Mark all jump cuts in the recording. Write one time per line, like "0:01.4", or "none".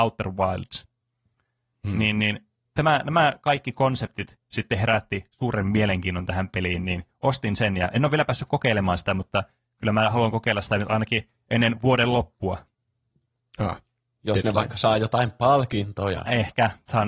none